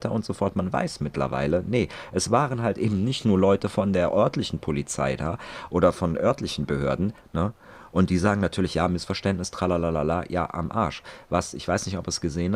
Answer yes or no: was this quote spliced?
yes